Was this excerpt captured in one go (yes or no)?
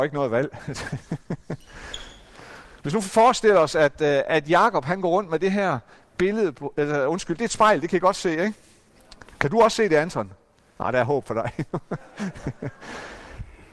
yes